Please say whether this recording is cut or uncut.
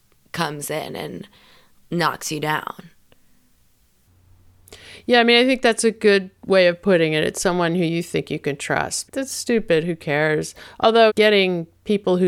cut